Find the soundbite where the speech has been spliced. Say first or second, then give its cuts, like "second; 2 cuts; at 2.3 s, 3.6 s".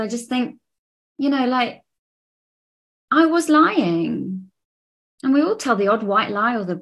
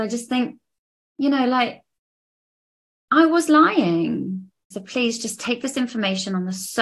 second; 1 cut; at 4.7 s